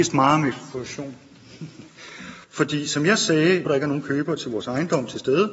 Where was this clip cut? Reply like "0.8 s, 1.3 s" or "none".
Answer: 2.4 s, 3.7 s